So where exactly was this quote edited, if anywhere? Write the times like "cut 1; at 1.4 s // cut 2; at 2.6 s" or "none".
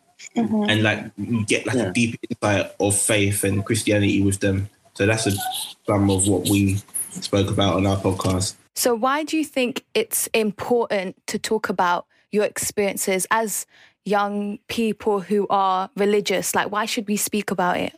none